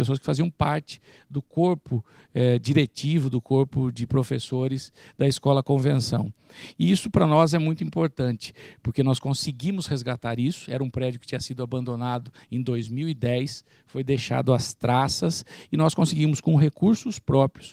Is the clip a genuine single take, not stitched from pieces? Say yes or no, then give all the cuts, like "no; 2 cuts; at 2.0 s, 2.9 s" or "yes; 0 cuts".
yes; 0 cuts